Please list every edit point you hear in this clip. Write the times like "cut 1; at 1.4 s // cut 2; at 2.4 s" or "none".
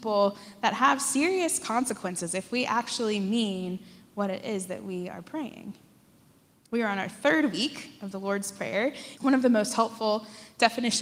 cut 1; at 9.2 s